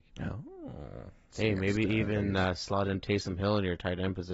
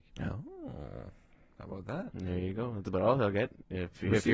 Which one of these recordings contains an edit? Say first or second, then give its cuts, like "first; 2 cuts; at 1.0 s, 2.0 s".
first; 1 cut; at 1.3 s